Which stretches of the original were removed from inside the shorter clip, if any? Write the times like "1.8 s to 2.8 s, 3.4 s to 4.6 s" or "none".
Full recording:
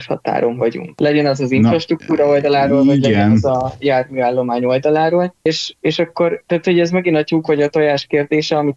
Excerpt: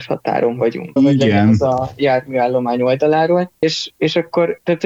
1.0 s to 2.8 s